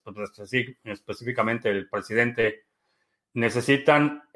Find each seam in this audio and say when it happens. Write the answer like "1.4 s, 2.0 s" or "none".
none